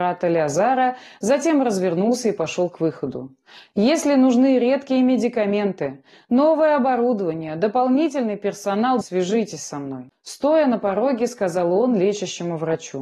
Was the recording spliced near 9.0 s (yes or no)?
yes